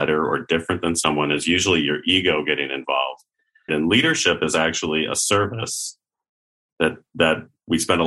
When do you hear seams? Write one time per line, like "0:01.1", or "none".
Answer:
0:03.7